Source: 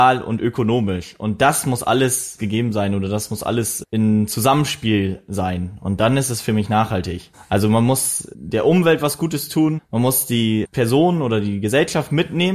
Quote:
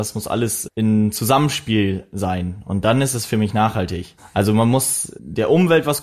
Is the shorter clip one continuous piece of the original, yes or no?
yes